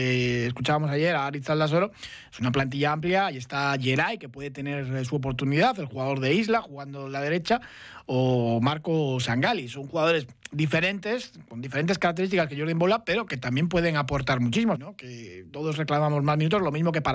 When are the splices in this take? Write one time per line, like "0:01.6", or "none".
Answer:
0:14.8